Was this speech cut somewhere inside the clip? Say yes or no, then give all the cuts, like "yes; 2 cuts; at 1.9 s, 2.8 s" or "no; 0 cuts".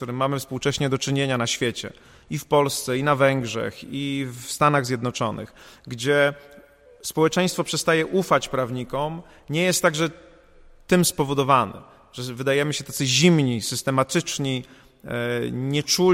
no; 0 cuts